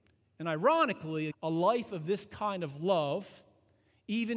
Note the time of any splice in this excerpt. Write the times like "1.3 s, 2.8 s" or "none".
1.3 s